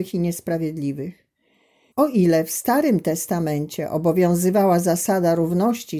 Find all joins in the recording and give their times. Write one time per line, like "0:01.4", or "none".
0:01.9